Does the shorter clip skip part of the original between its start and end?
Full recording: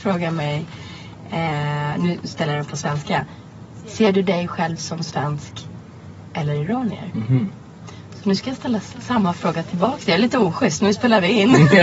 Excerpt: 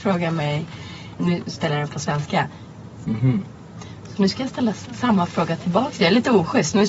yes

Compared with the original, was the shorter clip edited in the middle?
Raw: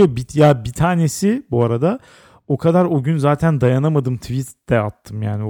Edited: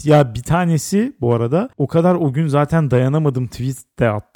yes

